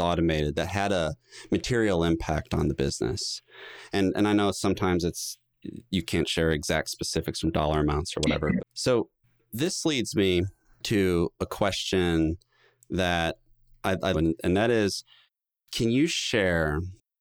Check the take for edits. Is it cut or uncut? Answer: cut